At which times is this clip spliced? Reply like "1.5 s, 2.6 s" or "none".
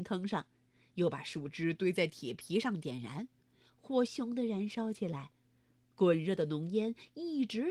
4.1 s